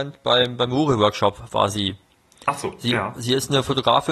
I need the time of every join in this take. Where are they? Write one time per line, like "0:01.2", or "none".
none